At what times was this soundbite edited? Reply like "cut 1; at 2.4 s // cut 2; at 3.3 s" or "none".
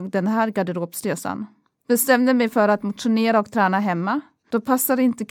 none